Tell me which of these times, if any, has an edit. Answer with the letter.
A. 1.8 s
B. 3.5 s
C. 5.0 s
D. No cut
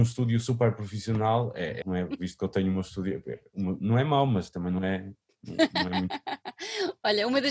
A